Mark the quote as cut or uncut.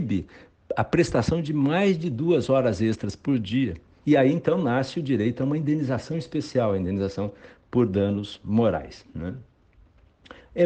cut